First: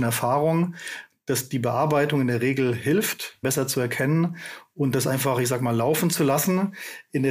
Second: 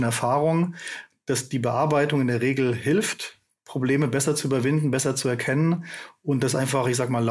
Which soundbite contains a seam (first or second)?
first